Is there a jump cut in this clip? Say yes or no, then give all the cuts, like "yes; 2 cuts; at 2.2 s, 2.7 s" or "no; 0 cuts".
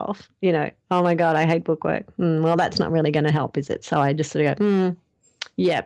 no; 0 cuts